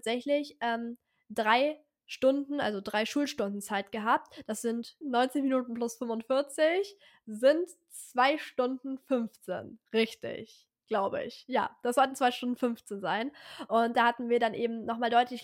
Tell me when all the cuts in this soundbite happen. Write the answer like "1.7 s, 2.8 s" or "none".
5.0 s